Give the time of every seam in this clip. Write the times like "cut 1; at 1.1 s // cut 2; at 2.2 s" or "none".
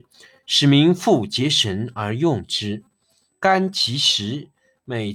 none